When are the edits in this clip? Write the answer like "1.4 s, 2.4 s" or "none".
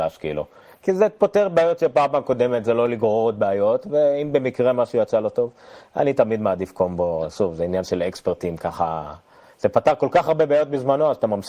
none